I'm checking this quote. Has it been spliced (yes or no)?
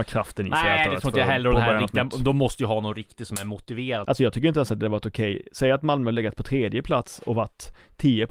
yes